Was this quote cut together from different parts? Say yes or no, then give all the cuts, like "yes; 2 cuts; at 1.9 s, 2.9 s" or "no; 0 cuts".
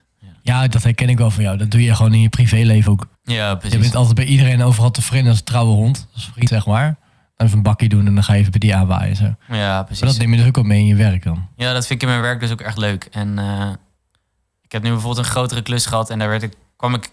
no; 0 cuts